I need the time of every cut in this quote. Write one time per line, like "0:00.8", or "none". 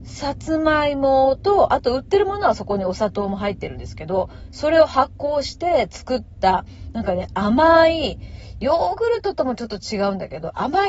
none